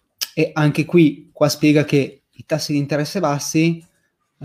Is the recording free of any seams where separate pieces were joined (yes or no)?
yes